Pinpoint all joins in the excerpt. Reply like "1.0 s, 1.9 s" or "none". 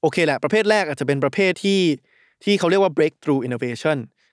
1.5 s